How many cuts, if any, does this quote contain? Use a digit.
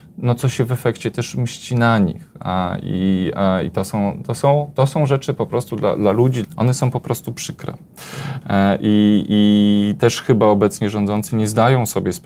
1